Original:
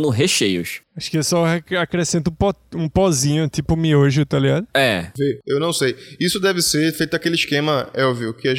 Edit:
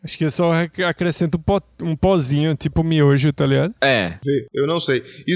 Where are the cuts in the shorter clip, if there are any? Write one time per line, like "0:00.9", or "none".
none